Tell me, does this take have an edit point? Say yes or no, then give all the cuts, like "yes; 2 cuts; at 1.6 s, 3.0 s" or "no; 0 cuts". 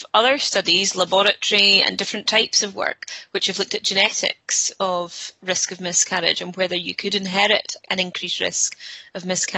yes; 1 cut; at 7.8 s